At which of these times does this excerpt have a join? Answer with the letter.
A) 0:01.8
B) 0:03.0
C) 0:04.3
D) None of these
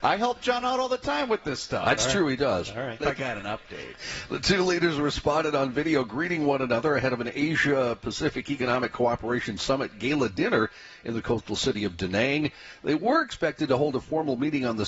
B